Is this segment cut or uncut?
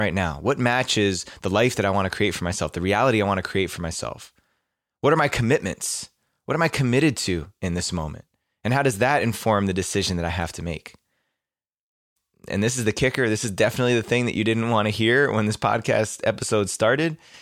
uncut